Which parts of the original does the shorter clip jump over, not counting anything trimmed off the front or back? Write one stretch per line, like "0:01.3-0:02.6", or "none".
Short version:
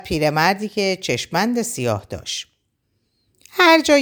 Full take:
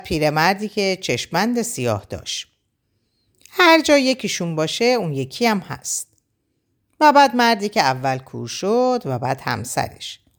none